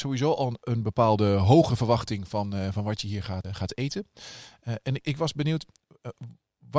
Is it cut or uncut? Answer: cut